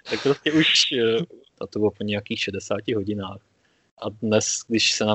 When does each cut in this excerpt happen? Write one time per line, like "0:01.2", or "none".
0:01.5